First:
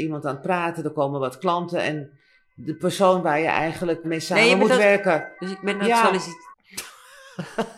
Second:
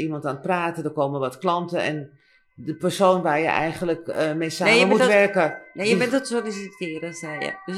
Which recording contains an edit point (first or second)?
first